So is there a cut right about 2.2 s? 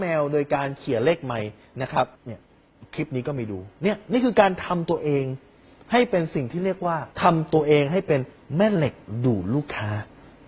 yes; 2 cuts; at 2.2 s, 7.1 s

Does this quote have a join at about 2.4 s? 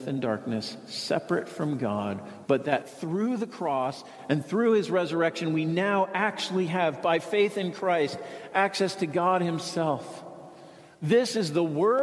yes; 1 cut; at 2.4 s

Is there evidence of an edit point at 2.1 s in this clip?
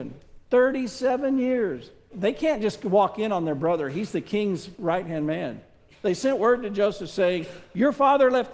yes; 1 cut; at 2.1 s

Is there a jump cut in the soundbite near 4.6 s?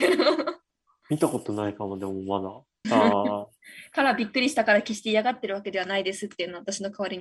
no; 1 cut; at 2.8 s

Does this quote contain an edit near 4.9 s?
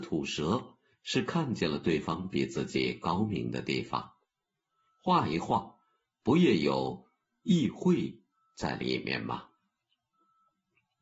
no; 0 cuts

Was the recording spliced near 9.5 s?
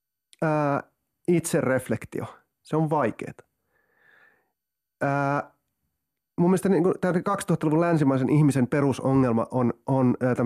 no; 0 cuts

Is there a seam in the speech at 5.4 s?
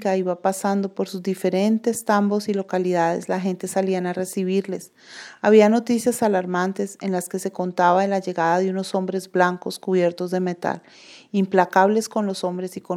no; 0 cuts

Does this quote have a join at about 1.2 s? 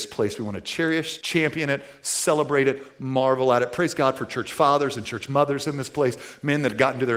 yes; 1 cut; at 1.2 s

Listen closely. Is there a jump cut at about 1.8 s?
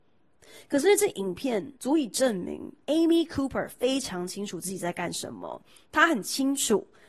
yes; 1 cut; at 1.8 s

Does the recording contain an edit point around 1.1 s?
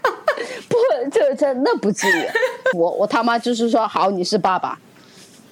no; 1 cut; at 2.7 s

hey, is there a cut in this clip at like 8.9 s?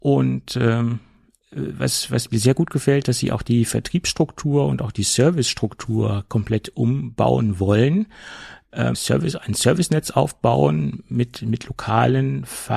yes; 1 cut; at 8.9 s

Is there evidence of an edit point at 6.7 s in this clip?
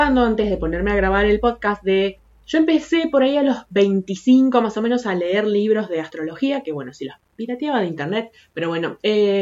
no; 0 cuts

